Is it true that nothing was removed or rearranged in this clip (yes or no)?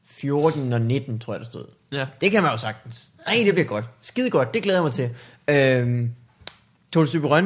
yes